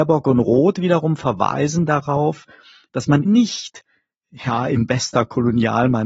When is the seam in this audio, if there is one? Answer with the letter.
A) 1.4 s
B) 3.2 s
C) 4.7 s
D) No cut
B